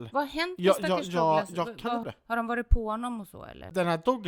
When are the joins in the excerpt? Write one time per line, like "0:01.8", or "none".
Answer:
0:02.0